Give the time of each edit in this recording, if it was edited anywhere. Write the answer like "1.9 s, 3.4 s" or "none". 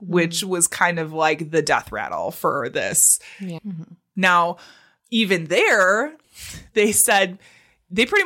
3.6 s